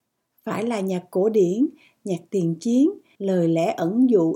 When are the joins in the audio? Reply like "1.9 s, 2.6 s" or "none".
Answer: 3.1 s